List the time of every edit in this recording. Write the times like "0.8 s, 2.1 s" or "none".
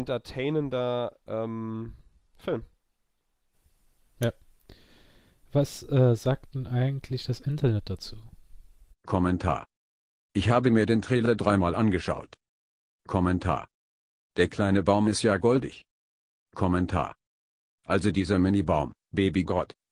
none